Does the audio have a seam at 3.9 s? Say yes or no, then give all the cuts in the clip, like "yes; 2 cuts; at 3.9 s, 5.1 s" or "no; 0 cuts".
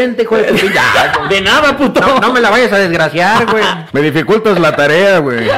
yes; 1 cut; at 3.9 s